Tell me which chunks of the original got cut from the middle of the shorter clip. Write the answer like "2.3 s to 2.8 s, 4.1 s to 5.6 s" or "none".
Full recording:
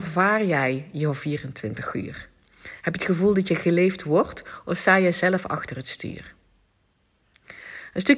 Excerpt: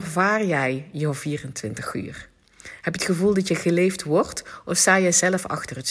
none